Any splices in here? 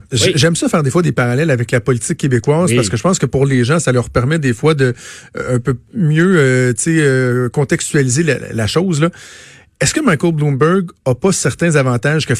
no; 0 cuts

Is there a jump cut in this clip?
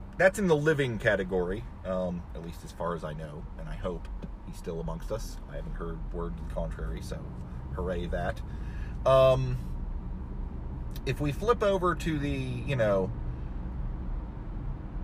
no; 0 cuts

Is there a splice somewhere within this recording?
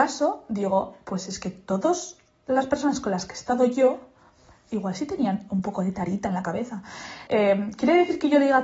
yes; 1 cut; at 7.3 s

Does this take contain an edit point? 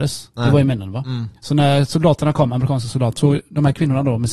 yes; 1 cut; at 3.2 s

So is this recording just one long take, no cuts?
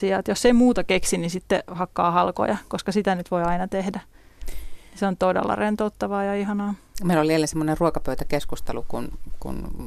yes; 0 cuts

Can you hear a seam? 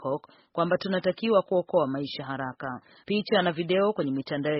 yes; 1 cut; at 3.0 s

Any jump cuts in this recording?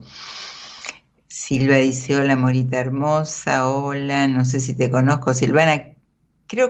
yes; 1 cut; at 1.2 s

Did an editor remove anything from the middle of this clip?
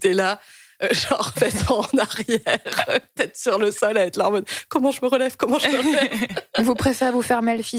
yes; 1 cut; at 1.3 s

